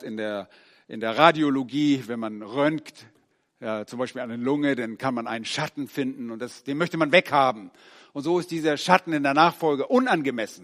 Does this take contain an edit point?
no; 0 cuts

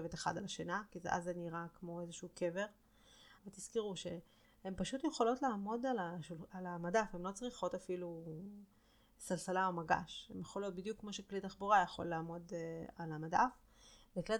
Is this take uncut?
no; 1 cut; at 3.4 s

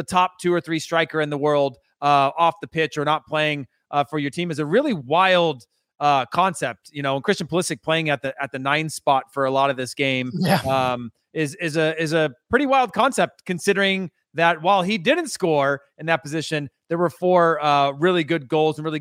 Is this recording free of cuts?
yes; 0 cuts

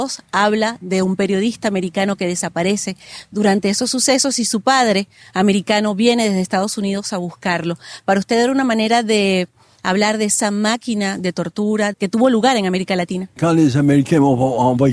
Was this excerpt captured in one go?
no; 1 cut; at 11.9 s

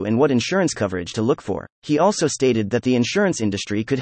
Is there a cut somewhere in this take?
yes; 1 cut; at 1.7 s

